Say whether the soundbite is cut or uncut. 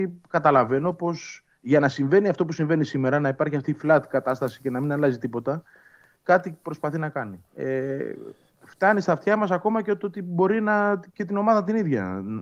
cut